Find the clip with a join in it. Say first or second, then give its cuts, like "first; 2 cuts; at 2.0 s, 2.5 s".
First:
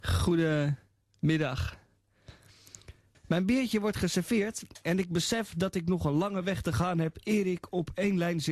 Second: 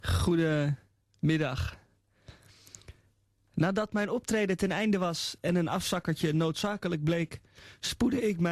first; 1 cut; at 3.1 s